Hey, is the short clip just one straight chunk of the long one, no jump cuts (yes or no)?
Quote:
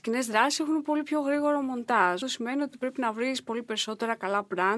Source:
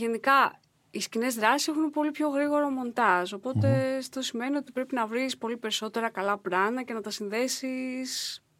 no